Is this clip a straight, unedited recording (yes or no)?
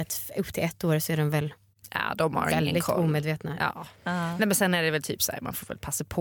yes